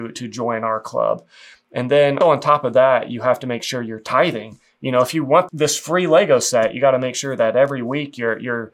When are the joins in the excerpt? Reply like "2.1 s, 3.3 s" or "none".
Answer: 2.2 s, 5.5 s